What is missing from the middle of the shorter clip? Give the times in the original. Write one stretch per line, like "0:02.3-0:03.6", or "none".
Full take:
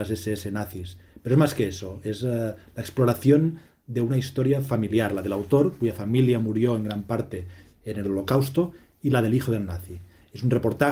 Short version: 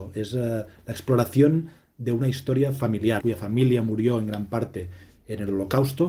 0:05.1-0:05.8